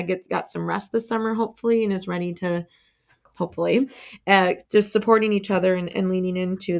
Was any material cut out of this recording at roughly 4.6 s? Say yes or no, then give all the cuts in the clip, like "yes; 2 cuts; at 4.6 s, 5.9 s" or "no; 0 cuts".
yes; 1 cut; at 4.6 s